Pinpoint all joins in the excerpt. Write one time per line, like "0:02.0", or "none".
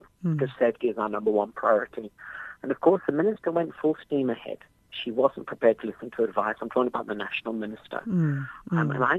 none